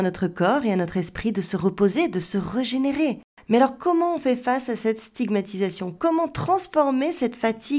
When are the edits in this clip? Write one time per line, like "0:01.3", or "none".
none